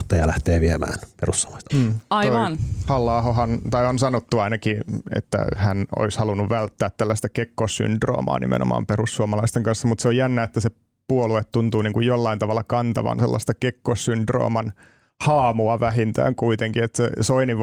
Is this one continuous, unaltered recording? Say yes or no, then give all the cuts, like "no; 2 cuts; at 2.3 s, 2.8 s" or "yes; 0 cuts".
no; 1 cut; at 1.7 s